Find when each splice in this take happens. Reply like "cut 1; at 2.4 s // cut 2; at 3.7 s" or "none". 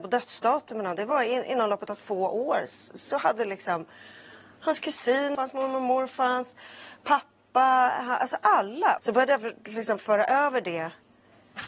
cut 1; at 5.3 s // cut 2; at 9.0 s